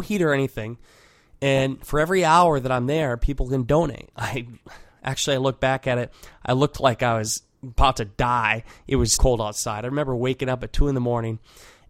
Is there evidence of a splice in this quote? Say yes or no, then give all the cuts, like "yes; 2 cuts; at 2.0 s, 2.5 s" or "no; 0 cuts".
yes; 2 cuts; at 4.1 s, 9.2 s